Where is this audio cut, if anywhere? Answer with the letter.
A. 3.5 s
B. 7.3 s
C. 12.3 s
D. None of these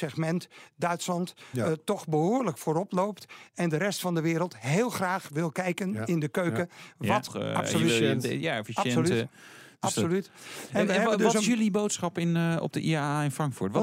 B